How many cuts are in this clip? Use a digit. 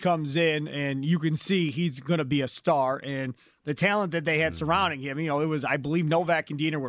0